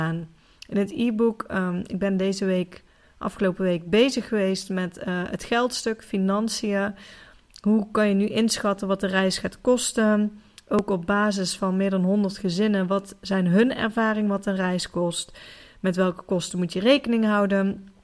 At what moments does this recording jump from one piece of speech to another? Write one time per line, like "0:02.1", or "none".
none